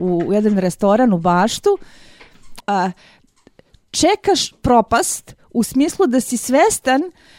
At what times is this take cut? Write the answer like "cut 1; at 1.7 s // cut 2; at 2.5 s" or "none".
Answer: cut 1; at 2.6 s